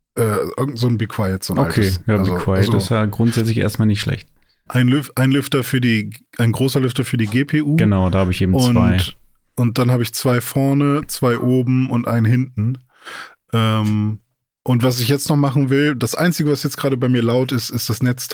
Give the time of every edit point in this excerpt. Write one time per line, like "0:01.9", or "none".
0:04.7